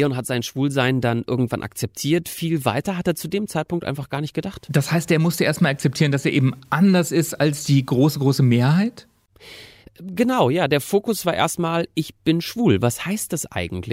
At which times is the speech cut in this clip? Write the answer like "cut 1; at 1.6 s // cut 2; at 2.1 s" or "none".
none